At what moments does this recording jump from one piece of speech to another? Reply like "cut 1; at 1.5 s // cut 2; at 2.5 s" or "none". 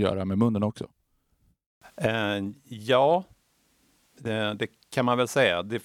none